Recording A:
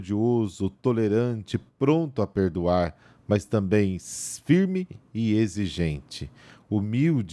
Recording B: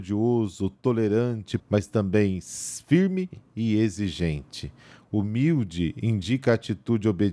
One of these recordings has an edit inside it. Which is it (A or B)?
B